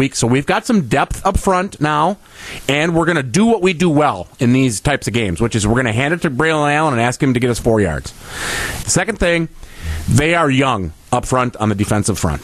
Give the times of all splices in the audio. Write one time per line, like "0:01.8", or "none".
0:08.8